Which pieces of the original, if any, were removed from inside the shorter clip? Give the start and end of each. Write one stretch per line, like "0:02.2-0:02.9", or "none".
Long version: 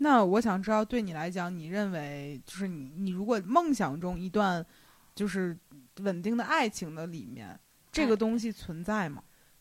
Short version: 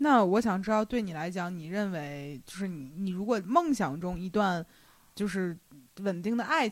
none